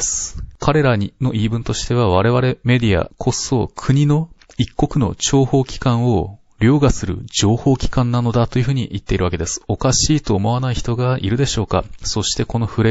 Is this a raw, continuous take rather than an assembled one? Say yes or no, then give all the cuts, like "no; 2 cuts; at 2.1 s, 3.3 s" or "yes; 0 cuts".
yes; 0 cuts